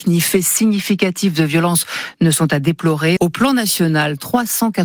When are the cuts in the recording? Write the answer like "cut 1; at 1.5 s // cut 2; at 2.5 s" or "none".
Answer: cut 1; at 3.2 s